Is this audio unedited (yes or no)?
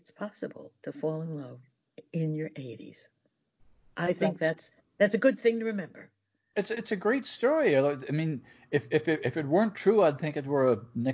yes